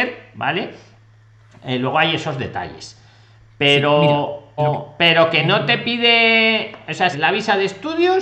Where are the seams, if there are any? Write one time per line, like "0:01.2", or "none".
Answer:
0:04.6
0:07.1